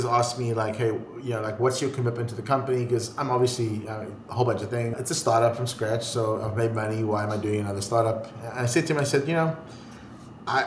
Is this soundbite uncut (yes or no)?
yes